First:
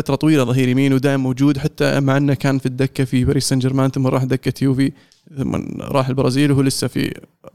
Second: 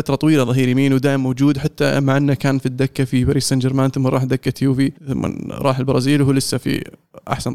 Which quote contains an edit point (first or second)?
second